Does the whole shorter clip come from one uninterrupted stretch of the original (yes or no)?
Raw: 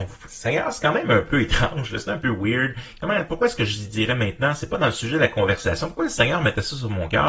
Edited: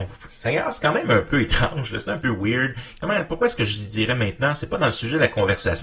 yes